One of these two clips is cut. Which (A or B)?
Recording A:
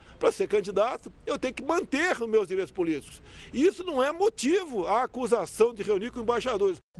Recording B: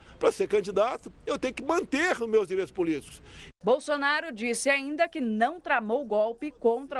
B